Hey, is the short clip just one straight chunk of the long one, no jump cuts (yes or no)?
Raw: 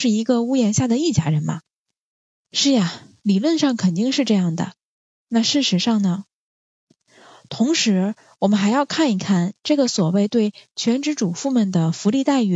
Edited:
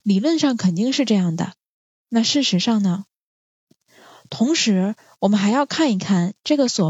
yes